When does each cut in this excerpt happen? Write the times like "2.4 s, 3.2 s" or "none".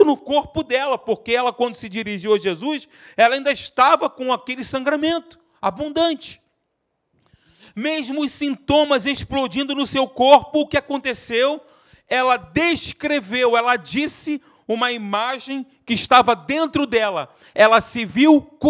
none